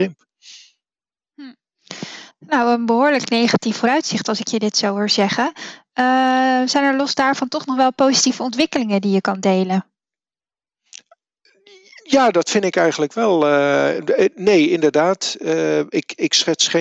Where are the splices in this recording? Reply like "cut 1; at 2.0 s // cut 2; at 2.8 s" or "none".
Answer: none